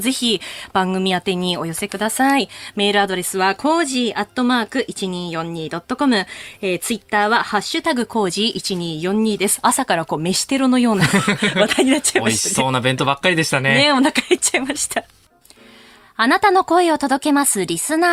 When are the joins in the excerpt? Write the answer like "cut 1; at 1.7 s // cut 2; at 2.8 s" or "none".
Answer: none